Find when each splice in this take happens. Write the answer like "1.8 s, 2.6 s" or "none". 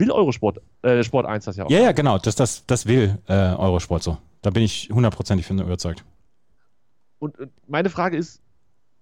none